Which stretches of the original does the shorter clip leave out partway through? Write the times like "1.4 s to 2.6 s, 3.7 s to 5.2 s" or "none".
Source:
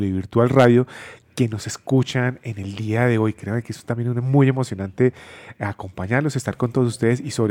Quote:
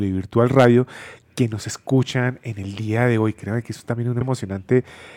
4.2 s to 4.5 s